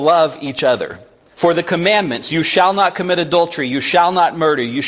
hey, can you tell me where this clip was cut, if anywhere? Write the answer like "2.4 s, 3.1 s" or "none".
1.3 s